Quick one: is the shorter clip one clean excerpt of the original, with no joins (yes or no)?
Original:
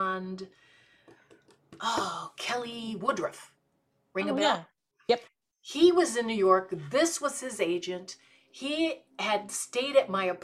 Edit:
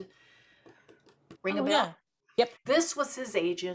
no